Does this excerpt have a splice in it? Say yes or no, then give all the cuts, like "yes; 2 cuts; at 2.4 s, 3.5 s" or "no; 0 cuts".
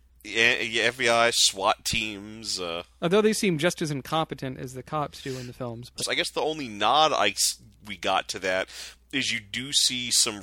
yes; 1 cut; at 6.0 s